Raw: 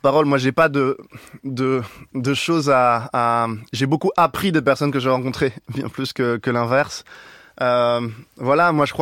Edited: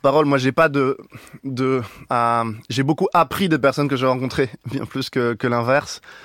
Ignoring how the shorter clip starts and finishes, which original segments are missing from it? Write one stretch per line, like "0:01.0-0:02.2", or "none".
0:02.1-0:03.1